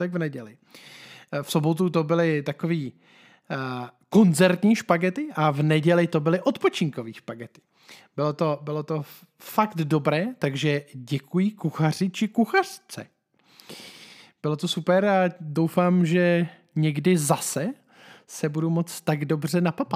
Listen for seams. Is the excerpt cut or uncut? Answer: uncut